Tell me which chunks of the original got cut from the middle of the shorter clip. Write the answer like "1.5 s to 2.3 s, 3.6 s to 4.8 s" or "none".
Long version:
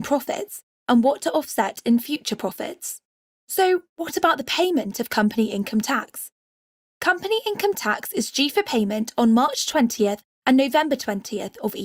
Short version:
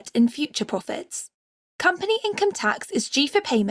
3.3 s to 6.8 s